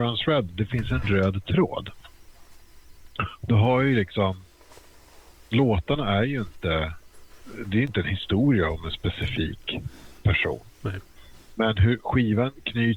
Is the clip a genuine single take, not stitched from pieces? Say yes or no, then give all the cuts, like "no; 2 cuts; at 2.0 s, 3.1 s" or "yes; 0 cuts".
yes; 0 cuts